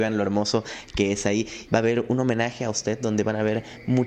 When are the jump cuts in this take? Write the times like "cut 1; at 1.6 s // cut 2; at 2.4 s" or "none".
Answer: cut 1; at 1.7 s